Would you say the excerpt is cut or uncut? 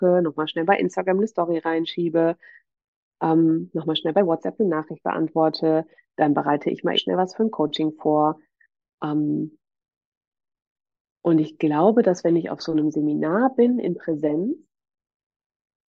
cut